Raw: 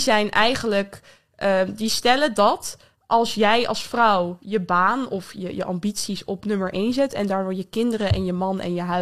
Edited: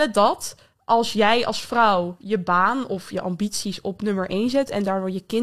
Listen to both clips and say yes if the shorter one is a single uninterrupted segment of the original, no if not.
no